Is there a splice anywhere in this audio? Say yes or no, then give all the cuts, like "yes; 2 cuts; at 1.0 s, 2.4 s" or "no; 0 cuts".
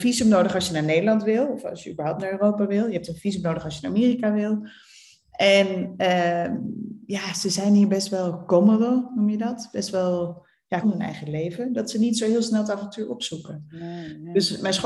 yes; 1 cut; at 10.8 s